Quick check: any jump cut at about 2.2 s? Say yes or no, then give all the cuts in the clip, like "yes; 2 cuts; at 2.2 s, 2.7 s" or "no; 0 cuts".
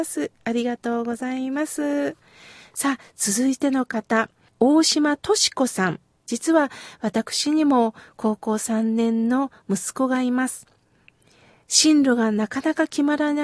no; 1 cut; at 6.2 s